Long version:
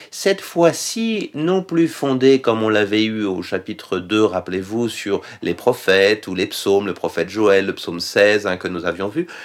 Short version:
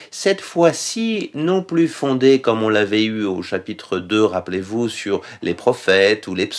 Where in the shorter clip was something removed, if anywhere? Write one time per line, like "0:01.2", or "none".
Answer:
none